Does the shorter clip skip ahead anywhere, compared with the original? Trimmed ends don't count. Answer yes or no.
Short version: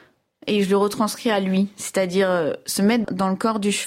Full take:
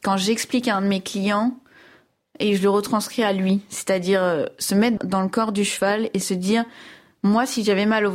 no